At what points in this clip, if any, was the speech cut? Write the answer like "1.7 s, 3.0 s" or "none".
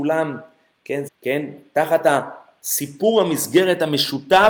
1.1 s